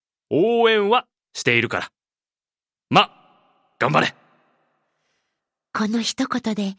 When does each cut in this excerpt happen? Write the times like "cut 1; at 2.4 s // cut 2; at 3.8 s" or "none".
none